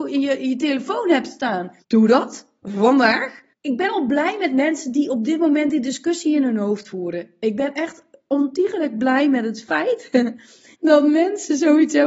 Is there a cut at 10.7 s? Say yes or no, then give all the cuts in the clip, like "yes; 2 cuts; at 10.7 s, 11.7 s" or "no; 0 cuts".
yes; 3 cuts; at 1.8 s, 3.5 s, 10.7 s